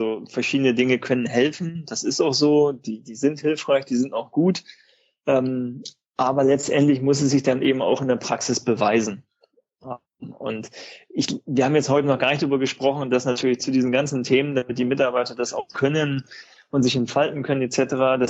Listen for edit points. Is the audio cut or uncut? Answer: uncut